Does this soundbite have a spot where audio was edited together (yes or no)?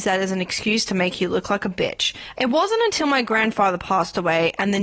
yes